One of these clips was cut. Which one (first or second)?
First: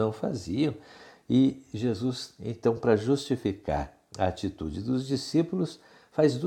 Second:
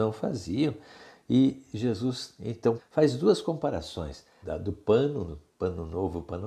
second